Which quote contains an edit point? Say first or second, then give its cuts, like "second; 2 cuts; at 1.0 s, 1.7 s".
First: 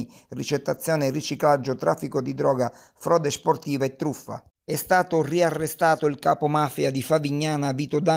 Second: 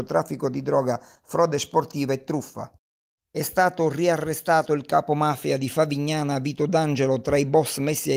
first; 1 cut; at 4.6 s